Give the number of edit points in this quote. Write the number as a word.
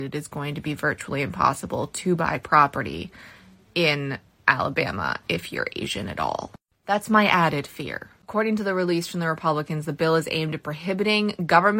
zero